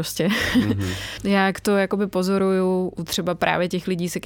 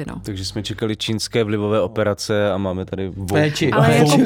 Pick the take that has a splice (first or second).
first